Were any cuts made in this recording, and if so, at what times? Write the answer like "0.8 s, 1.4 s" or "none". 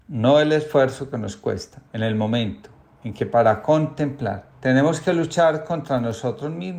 1.9 s, 4.5 s